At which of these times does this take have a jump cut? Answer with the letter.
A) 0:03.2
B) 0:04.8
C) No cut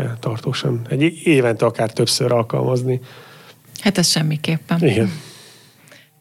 C